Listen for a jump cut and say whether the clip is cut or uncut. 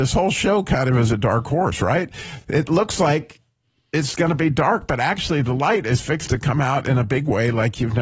uncut